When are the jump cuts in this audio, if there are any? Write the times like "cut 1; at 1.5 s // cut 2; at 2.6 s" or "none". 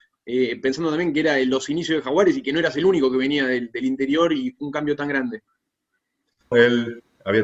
cut 1; at 6.5 s